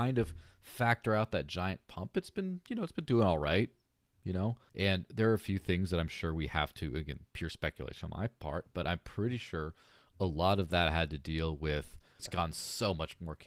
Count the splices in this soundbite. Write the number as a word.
two